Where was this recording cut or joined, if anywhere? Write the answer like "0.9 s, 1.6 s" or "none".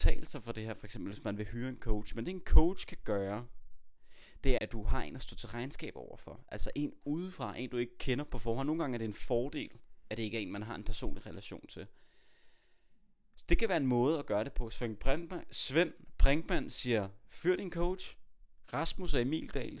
4.6 s